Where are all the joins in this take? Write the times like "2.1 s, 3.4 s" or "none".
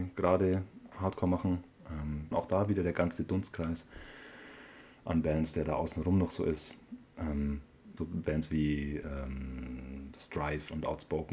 2.3 s, 8.0 s